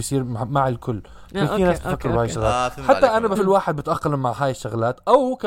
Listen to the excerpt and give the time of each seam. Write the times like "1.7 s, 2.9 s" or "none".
3.4 s